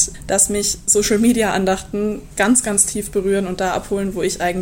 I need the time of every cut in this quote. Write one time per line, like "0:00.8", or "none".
none